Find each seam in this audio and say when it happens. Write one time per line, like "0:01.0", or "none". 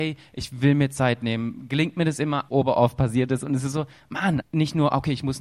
0:02.5
0:04.4